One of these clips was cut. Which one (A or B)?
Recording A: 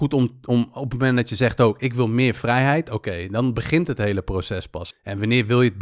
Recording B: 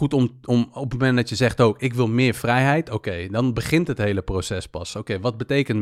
A